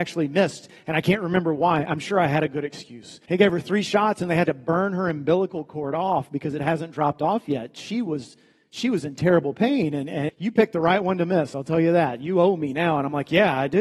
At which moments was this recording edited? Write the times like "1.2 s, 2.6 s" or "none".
3.3 s, 10.3 s